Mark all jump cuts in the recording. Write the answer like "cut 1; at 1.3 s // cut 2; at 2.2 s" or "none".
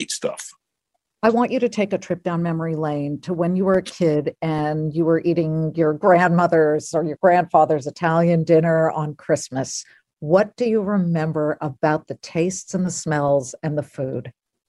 none